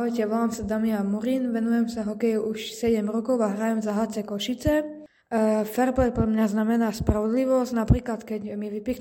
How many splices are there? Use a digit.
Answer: 0